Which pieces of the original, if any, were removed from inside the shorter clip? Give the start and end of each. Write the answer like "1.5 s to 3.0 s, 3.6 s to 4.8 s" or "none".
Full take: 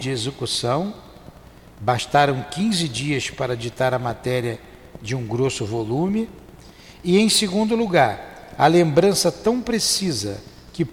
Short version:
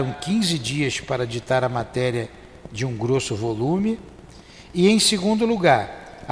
none